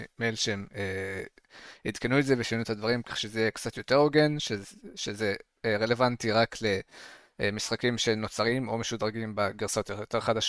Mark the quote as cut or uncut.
uncut